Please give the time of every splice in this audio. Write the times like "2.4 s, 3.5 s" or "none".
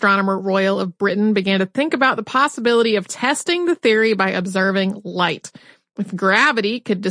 none